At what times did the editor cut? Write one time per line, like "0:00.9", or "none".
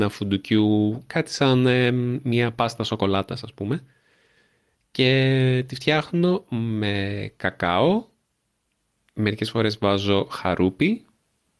none